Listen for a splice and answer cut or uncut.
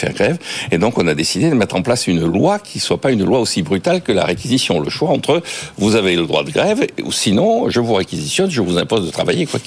uncut